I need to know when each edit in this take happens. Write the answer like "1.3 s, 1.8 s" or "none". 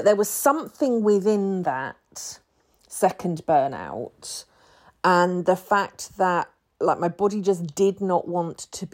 none